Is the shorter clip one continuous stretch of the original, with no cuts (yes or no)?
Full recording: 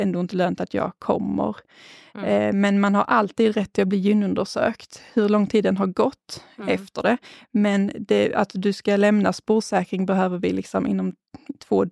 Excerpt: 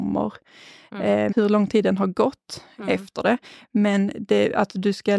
no